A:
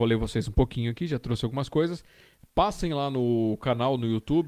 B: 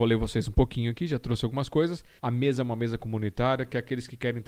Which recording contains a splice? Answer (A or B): B